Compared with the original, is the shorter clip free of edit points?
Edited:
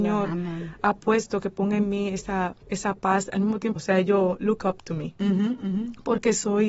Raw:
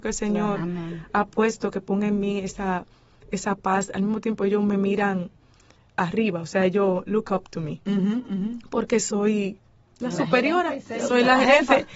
no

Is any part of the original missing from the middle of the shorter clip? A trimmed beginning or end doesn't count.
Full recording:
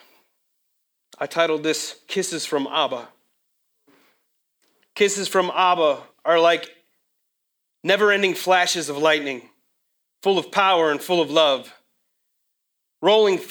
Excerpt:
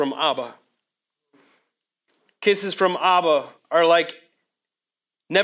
no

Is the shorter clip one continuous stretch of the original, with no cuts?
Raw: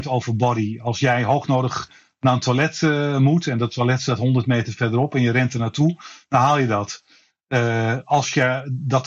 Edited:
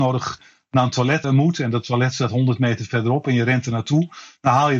no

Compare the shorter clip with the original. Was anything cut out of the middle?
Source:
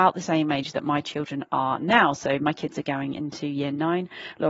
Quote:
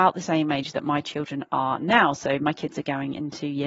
no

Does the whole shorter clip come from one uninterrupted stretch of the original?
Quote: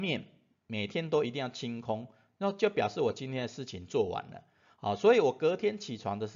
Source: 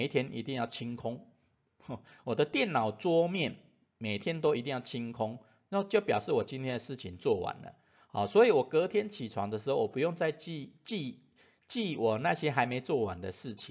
yes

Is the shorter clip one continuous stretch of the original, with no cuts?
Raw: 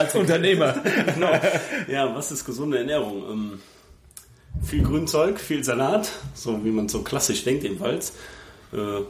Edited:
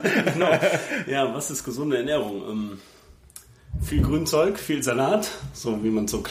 yes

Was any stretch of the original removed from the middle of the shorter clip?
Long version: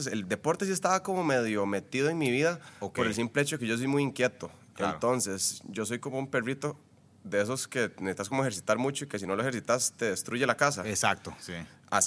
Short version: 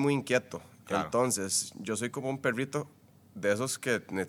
no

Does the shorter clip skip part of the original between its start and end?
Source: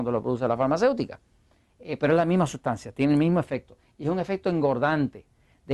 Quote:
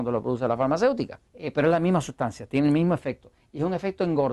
yes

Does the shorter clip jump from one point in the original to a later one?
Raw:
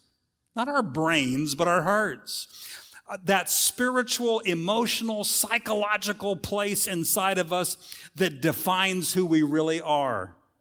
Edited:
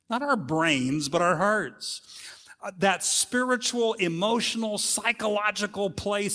no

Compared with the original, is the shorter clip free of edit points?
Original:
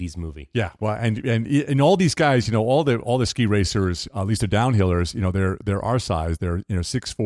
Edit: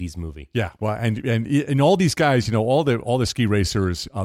yes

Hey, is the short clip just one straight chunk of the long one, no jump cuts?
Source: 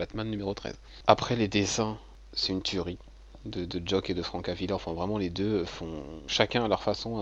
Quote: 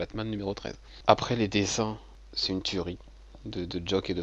yes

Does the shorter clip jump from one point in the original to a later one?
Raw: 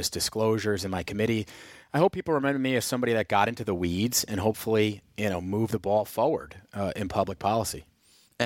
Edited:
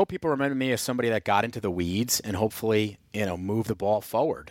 no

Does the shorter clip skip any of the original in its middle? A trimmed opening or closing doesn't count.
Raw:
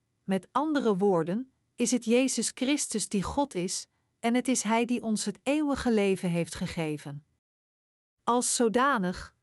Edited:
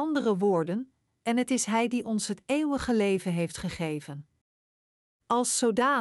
yes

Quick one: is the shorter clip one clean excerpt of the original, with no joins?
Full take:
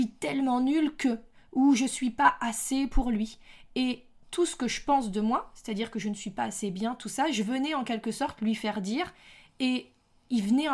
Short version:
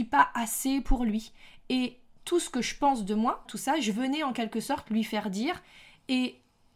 no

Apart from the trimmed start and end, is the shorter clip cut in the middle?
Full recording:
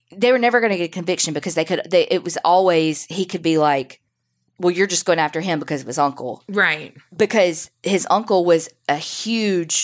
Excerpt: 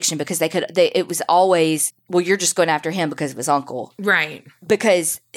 yes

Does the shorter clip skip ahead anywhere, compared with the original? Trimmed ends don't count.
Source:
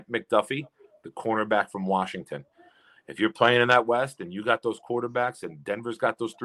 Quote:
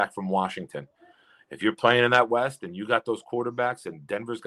no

